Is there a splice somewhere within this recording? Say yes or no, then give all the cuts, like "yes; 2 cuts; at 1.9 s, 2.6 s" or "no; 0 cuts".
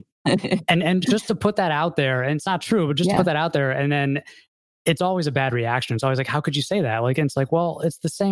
no; 0 cuts